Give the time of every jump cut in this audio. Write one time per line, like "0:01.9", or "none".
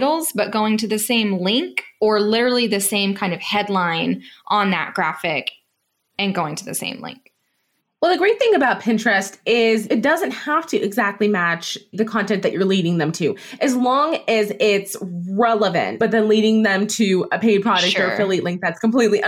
0:16.0